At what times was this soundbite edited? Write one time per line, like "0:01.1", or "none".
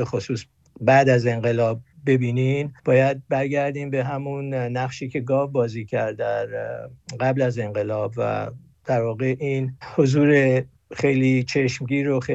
0:02.8